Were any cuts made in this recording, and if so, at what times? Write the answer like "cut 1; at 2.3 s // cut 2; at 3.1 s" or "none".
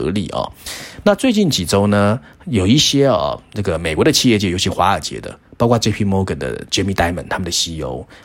none